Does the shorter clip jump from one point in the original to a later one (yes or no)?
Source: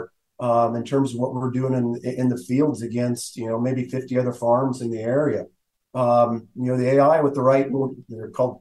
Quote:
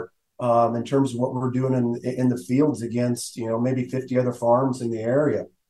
no